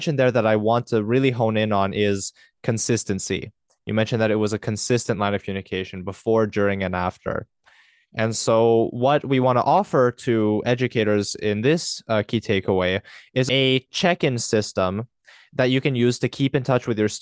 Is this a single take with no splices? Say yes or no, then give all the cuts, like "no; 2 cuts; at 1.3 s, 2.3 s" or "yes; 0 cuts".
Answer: yes; 0 cuts